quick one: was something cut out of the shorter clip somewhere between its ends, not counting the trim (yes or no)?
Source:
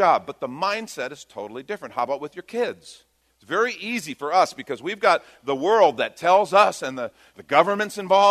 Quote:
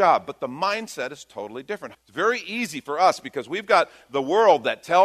yes